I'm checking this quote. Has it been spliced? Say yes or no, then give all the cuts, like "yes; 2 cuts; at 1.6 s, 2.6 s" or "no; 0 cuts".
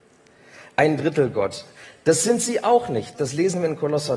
yes; 1 cut; at 3.1 s